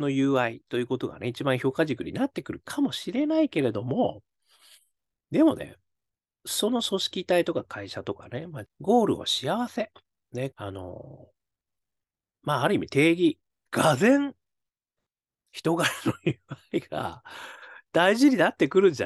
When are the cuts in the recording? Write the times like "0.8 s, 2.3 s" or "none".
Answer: 8.6 s, 10.5 s, 13.7 s